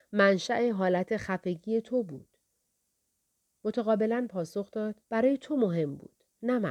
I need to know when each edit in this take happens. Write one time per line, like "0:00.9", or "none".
0:05.0